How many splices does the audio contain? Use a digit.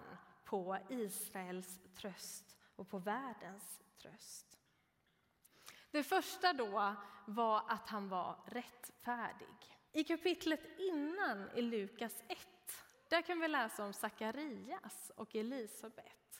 1